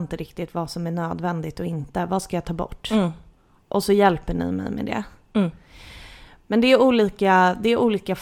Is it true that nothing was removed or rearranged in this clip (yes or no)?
yes